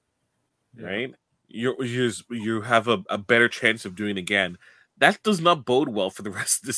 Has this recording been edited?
no; 0 cuts

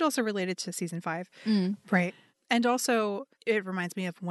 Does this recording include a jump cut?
yes; 1 cut; at 1.8 s

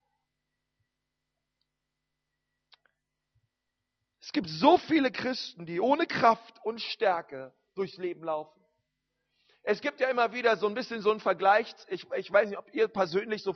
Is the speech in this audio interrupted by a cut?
no; 0 cuts

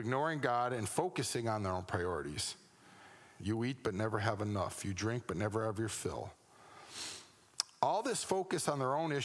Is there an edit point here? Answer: yes; 1 cut; at 3.4 s

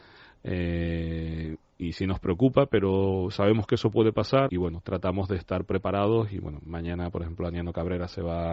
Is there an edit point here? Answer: yes; 1 cut; at 4.5 s

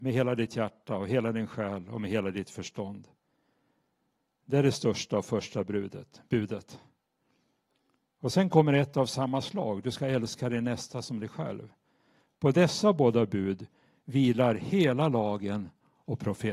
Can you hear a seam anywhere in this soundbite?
no; 0 cuts

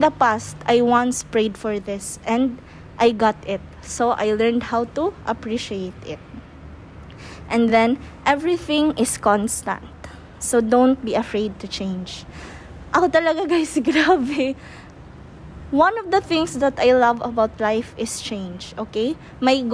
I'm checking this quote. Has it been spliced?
no; 0 cuts

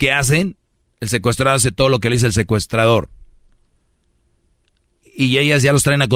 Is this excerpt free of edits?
yes; 0 cuts

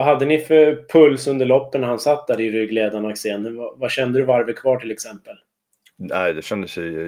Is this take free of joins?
yes; 0 cuts

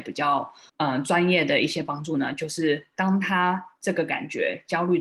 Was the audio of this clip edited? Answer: no; 0 cuts

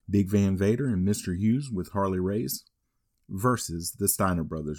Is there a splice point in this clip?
no; 0 cuts

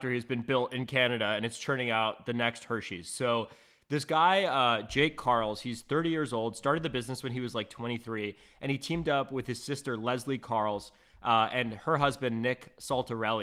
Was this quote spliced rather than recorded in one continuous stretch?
no; 0 cuts

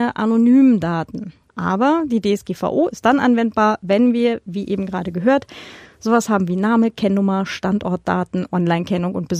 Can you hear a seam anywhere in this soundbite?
yes; 1 cut; at 1.5 s

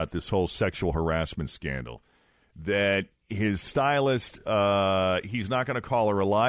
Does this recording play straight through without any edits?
yes; 0 cuts

